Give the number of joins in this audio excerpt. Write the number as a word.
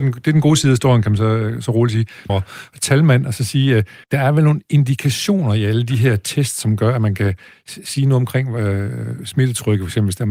two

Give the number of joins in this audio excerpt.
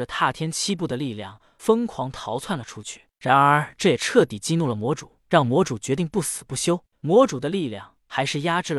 one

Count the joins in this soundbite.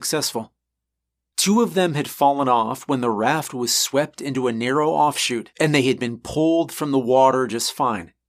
two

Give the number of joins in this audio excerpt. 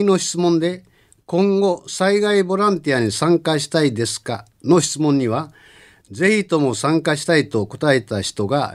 zero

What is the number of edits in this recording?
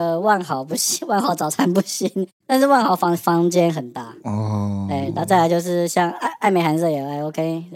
zero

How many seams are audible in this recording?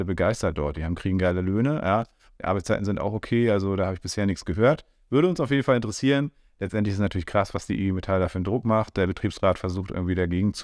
zero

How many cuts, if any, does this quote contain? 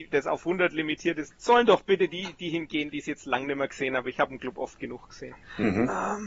one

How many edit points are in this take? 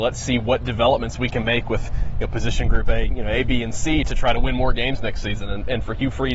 zero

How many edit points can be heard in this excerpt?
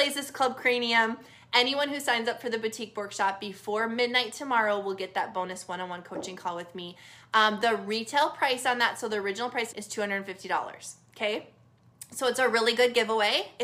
one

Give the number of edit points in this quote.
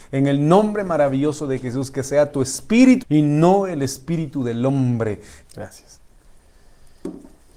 two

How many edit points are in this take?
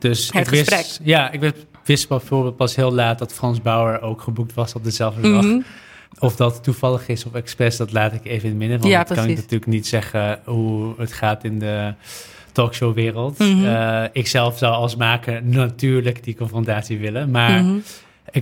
zero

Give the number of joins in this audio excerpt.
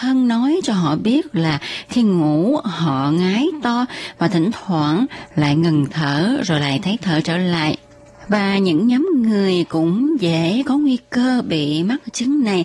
one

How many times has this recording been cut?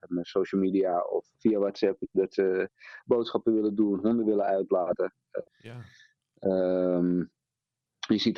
two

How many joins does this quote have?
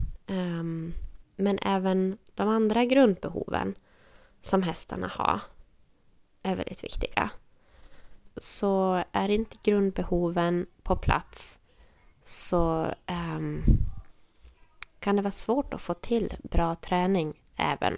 one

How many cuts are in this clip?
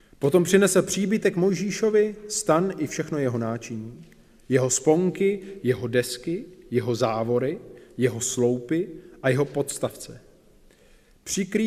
zero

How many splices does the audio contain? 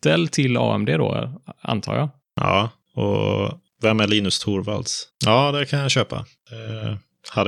one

